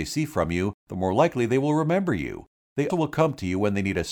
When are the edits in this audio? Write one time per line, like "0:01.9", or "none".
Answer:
0:02.9